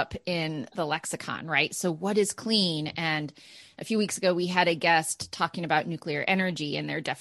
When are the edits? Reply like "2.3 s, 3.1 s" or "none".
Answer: none